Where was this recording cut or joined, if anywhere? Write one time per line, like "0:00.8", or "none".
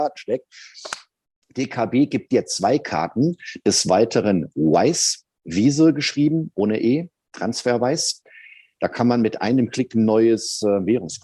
none